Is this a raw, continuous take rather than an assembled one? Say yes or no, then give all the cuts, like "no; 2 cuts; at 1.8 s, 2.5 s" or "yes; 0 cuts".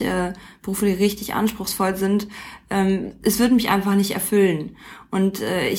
yes; 0 cuts